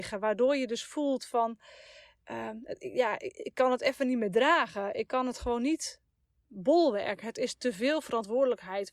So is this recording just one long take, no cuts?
yes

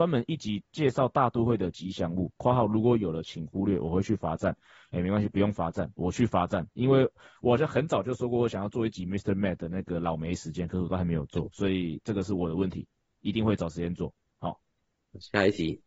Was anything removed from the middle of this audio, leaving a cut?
no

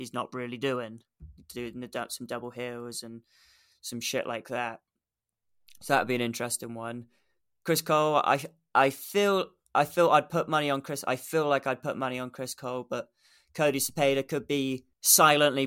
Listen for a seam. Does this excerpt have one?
no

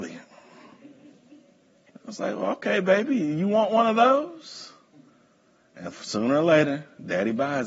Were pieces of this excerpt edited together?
yes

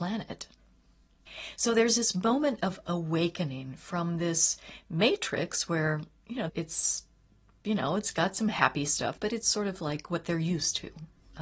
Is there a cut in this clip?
yes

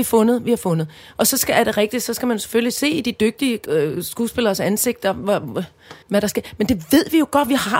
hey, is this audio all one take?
no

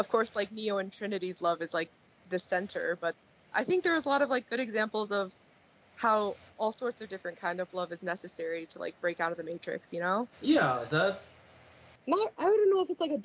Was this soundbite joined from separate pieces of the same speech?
yes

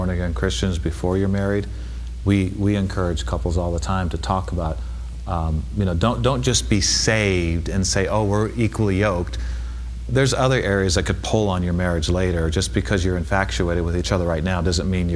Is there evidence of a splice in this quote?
no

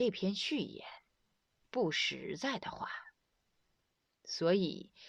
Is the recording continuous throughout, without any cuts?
no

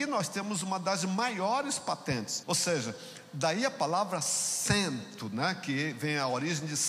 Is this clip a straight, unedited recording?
no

